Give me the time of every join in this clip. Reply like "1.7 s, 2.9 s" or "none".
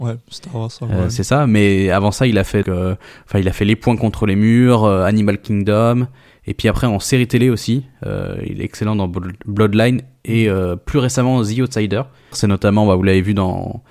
2.6 s, 12.3 s